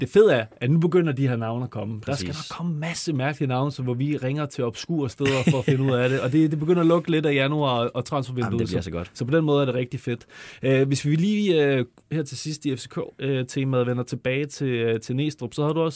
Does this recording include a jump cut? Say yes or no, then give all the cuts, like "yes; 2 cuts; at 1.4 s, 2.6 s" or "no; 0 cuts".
no; 0 cuts